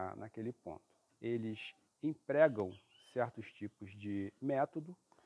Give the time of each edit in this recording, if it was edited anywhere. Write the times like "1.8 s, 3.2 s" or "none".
1.1 s